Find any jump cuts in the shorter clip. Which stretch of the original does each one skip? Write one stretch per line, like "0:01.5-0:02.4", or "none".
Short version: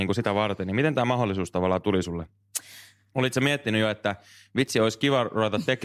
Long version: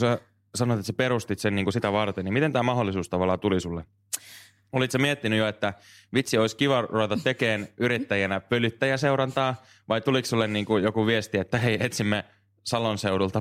none